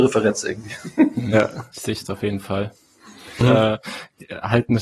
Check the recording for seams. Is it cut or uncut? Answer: cut